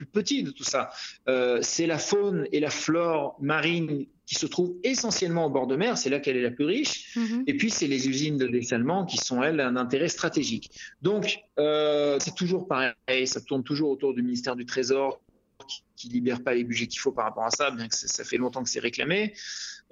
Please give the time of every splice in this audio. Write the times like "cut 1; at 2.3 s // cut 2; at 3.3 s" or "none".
cut 1; at 12.2 s